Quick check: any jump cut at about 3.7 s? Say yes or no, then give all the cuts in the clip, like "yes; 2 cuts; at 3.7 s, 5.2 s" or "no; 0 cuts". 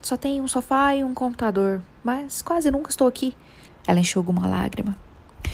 yes; 1 cut; at 3.7 s